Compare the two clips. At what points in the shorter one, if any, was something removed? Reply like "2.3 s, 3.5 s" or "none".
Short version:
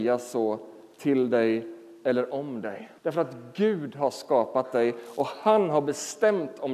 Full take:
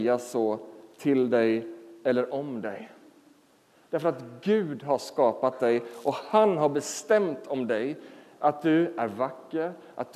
3.0 s